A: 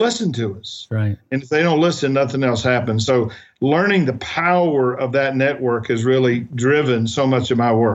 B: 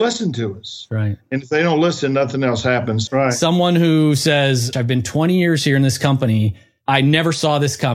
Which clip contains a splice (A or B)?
B